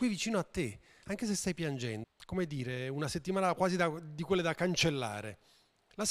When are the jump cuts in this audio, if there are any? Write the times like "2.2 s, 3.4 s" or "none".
2.0 s